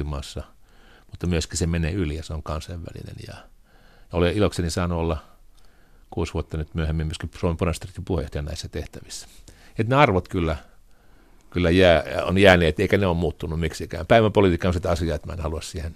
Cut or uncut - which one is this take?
uncut